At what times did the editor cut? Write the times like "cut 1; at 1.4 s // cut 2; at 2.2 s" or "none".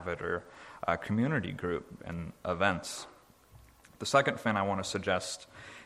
cut 1; at 2.0 s